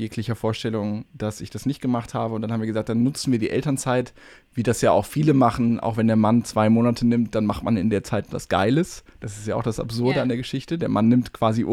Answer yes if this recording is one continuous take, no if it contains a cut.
yes